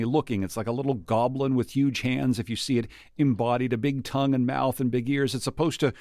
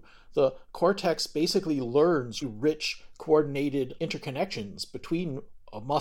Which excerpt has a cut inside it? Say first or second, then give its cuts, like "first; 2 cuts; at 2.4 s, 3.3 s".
second; 2 cuts; at 2.4 s, 4.0 s